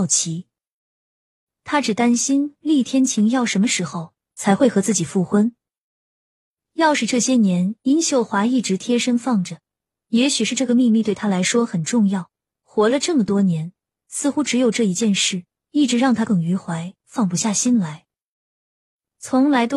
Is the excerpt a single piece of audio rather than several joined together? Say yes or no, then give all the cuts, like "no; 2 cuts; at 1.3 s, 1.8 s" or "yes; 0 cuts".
no; 1 cut; at 16.3 s